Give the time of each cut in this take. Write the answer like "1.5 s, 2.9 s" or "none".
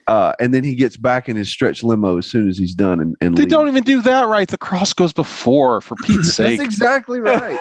none